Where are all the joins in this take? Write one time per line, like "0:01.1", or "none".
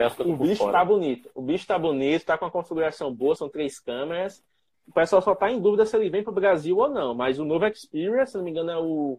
0:03.4
0:04.7